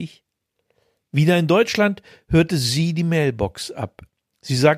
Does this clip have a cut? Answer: no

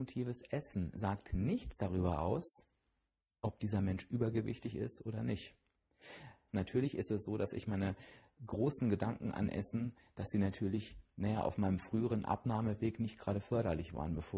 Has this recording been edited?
yes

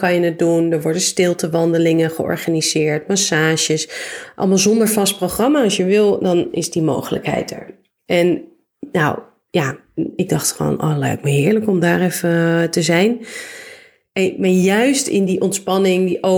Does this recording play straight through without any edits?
yes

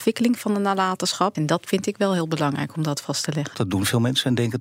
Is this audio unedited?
no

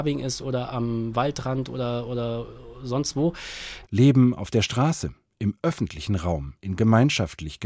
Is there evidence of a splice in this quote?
yes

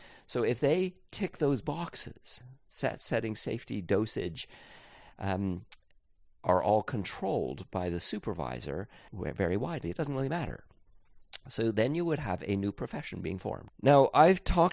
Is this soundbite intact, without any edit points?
no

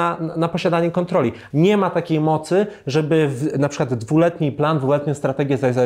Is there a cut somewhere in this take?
yes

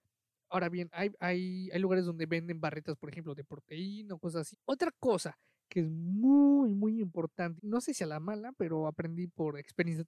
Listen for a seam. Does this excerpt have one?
yes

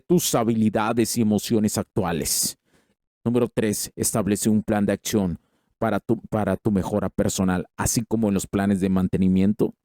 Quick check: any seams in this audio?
no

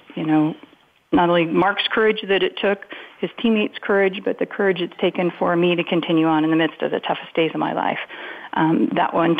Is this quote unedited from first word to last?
yes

